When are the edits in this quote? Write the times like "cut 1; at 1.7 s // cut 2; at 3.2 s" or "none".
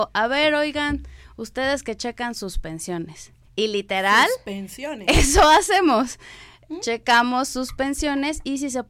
none

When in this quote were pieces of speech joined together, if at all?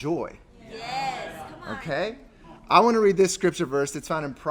none

